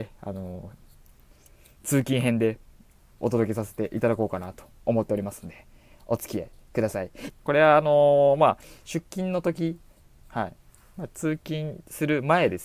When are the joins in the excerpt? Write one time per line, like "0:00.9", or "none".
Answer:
0:07.3

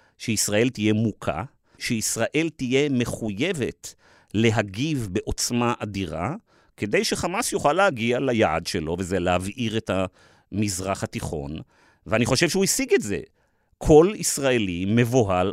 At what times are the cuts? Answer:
0:01.8

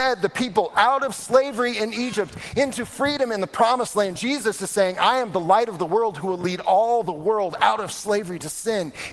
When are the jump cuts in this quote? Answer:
none

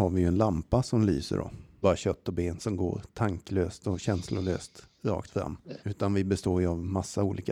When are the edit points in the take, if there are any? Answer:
0:01.8
0:05.8

